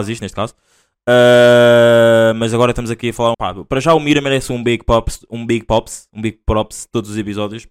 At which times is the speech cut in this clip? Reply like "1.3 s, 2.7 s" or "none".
3.3 s